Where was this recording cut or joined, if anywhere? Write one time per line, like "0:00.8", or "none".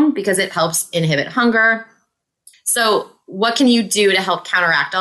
0:02.5